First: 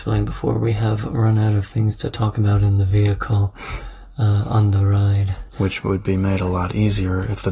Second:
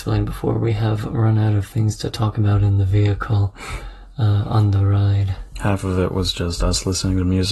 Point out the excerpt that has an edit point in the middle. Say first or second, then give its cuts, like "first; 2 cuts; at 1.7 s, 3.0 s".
first; 1 cut; at 5.5 s